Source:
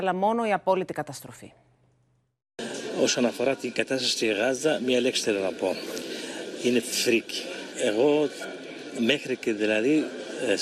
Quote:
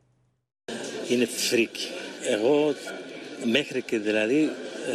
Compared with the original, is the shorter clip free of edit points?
no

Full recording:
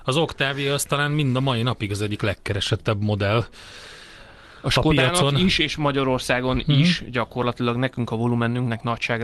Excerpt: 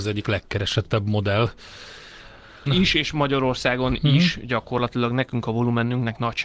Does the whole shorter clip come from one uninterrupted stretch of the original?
no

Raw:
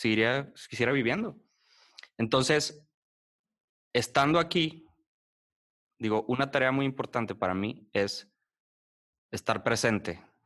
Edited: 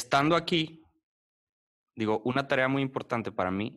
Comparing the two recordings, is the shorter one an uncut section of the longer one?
yes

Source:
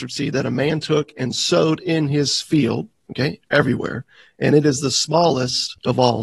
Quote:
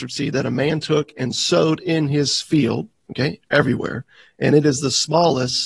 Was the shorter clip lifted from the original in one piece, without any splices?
yes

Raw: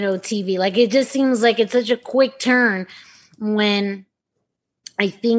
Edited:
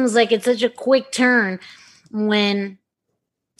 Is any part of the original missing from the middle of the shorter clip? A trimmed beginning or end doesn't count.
no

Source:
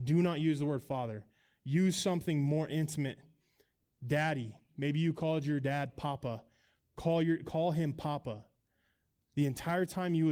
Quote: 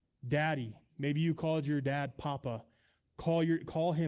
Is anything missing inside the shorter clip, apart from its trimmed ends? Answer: no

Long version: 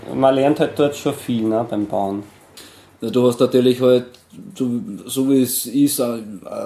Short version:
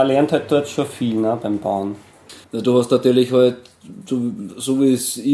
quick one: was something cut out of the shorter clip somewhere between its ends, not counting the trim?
yes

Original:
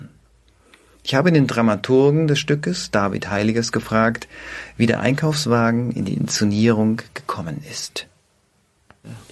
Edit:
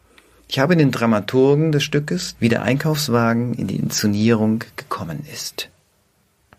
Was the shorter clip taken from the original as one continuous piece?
no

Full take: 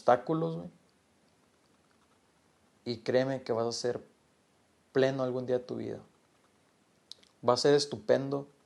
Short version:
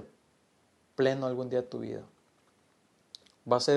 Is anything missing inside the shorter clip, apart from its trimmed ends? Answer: no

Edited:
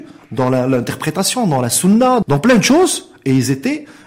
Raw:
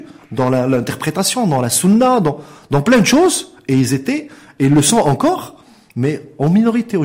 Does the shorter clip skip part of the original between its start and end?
yes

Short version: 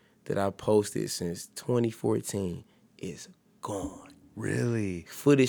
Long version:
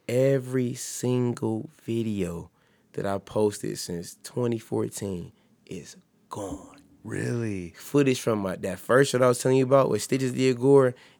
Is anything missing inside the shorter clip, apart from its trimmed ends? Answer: no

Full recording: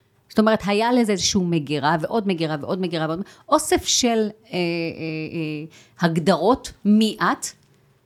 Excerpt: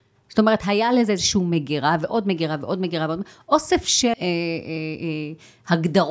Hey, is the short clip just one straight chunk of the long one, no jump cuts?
no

